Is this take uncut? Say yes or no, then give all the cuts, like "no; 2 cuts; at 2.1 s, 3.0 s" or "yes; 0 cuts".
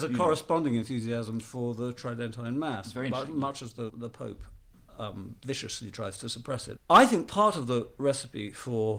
no; 2 cuts; at 3.9 s, 6.8 s